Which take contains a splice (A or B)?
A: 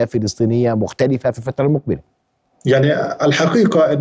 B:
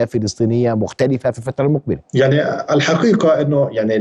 B